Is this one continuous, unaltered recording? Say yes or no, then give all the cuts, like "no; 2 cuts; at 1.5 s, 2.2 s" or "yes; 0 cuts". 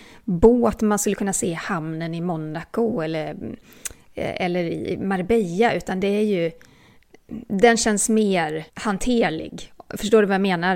no; 1 cut; at 8.7 s